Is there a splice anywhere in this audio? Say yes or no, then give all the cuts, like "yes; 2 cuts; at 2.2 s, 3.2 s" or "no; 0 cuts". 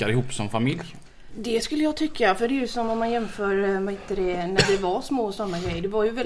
yes; 1 cut; at 1.3 s